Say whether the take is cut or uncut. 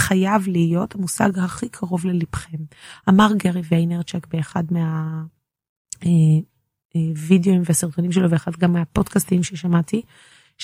uncut